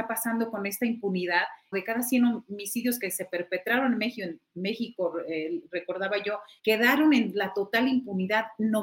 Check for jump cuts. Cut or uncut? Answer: cut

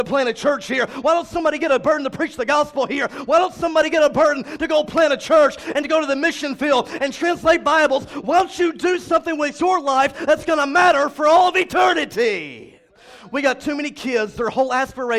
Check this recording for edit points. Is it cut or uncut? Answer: uncut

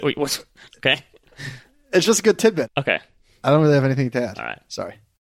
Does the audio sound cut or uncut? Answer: uncut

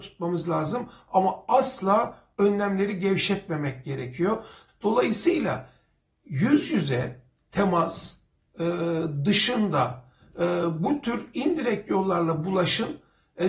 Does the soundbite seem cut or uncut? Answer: cut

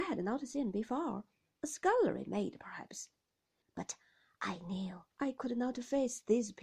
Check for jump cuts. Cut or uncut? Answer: cut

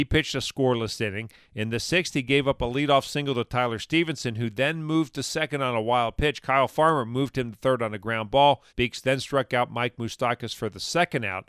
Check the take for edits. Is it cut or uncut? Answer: cut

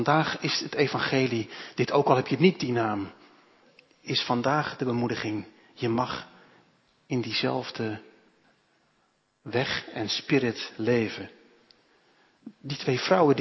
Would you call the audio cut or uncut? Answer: uncut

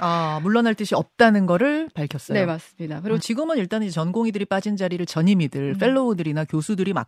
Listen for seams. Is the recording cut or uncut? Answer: cut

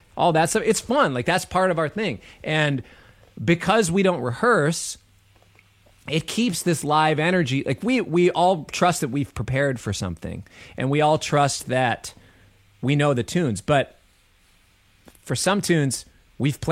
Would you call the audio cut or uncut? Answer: uncut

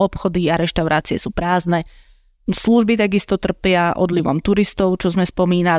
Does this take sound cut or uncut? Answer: uncut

